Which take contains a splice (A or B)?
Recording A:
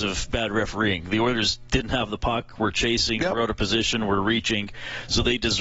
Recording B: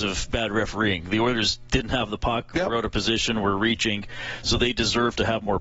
B